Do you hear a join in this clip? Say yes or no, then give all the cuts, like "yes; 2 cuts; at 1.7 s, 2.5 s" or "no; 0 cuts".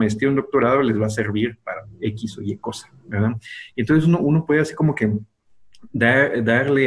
no; 0 cuts